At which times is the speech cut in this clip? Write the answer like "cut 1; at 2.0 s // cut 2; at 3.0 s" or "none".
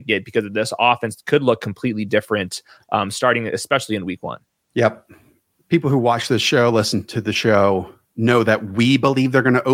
none